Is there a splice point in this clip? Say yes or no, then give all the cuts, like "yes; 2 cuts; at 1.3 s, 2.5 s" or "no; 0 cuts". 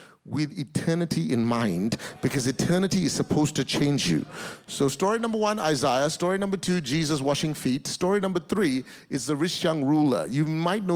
no; 0 cuts